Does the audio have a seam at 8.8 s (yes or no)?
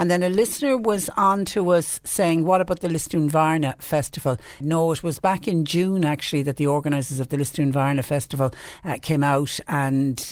no